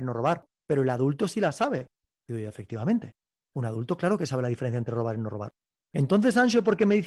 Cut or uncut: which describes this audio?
uncut